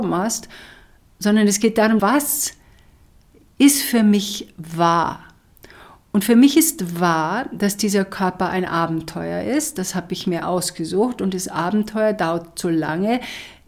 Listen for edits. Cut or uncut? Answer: cut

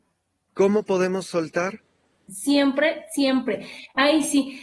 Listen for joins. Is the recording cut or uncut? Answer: cut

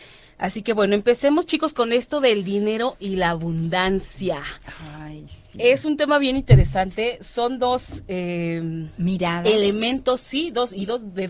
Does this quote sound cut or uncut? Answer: uncut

